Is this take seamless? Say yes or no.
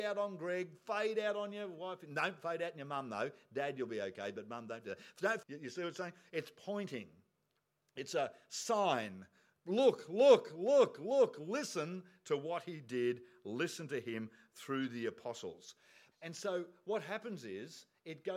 no